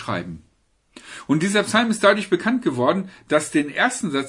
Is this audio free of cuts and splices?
yes; 0 cuts

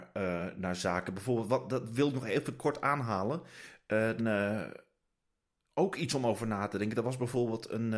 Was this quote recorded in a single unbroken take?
no; 1 cut; at 4.2 s

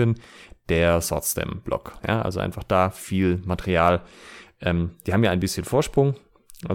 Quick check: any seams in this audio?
no; 0 cuts

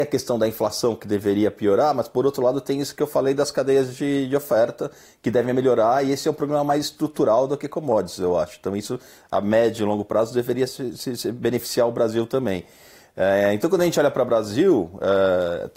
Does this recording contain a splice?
no; 0 cuts

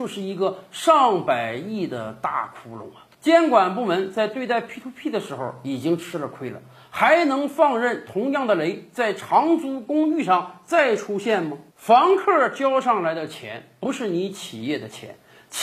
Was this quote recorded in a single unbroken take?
no; 1 cut; at 11.7 s

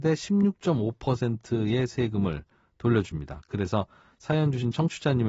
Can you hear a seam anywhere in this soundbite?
no; 0 cuts

